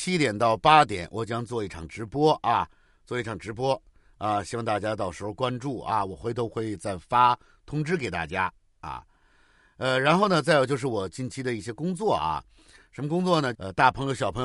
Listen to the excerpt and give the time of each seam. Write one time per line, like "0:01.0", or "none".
0:13.5